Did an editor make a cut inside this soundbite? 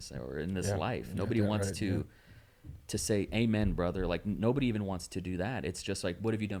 no; 0 cuts

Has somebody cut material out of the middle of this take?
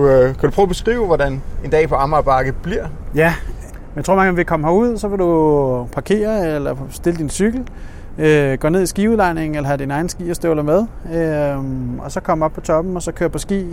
no; 0 cuts

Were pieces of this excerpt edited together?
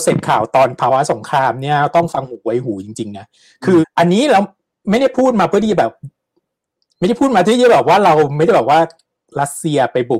yes; 1 cut; at 3.8 s

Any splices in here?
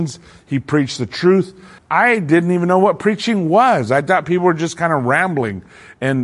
yes; 1 cut; at 1.8 s

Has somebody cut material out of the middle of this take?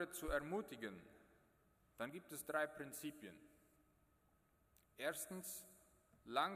no; 0 cuts

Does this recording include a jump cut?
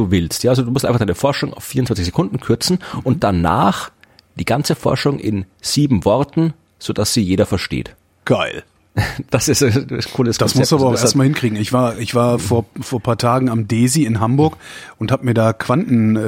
no; 0 cuts

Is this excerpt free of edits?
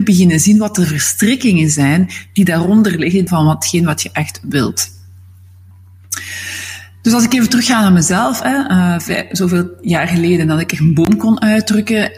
no; 1 cut; at 3.3 s

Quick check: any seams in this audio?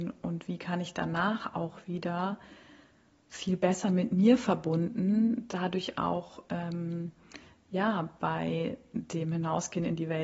no; 0 cuts

